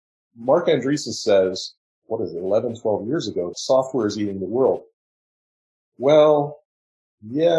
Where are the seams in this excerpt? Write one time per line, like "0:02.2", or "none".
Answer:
0:03.5